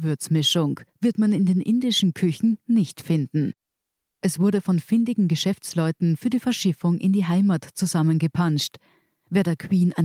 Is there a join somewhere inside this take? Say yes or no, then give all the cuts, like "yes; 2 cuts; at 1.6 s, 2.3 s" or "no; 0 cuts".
no; 0 cuts